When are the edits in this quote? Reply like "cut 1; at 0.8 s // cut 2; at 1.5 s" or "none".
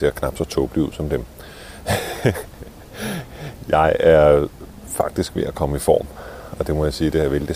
none